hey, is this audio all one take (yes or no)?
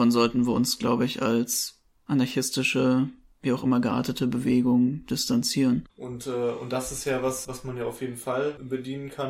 no